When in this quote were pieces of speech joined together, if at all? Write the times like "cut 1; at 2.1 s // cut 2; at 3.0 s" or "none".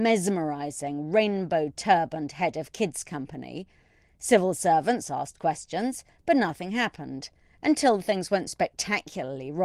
cut 1; at 4.0 s // cut 2; at 8.5 s